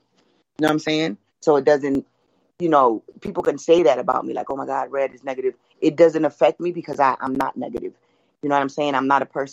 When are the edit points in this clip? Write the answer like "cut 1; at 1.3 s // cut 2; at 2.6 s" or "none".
cut 1; at 1.3 s